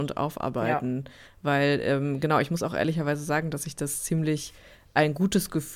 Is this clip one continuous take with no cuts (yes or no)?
yes